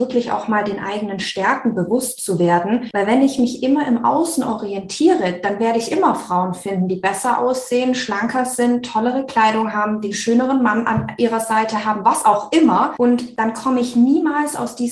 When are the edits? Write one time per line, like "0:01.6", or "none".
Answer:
none